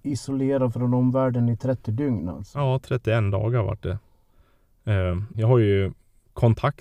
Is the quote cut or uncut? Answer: cut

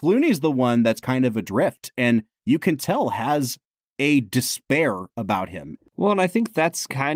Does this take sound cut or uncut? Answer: cut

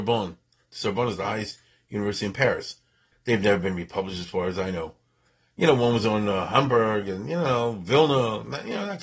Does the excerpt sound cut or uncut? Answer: cut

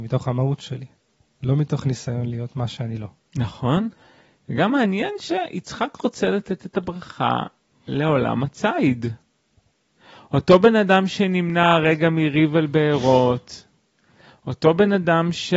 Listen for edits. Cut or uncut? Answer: uncut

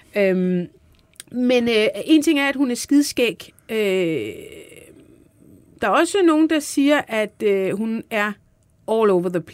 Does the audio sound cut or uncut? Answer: uncut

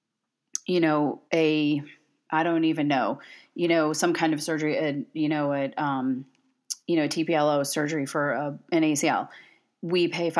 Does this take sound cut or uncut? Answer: cut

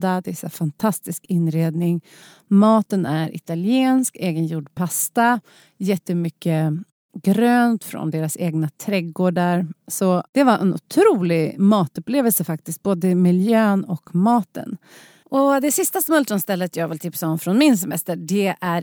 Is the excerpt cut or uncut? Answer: cut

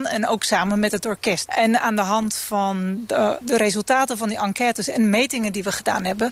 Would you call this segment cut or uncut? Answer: cut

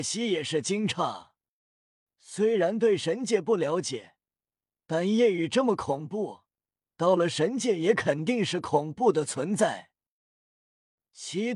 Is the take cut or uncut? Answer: cut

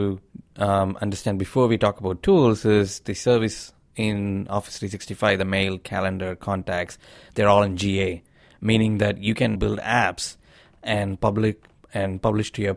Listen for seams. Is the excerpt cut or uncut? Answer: cut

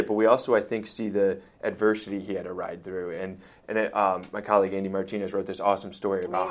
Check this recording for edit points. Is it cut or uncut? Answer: uncut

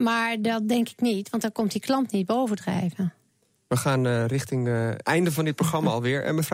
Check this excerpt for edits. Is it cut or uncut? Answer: uncut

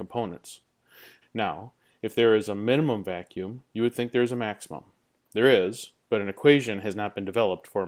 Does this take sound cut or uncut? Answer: cut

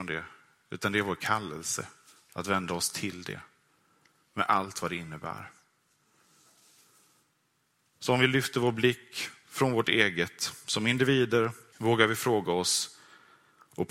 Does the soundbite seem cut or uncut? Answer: cut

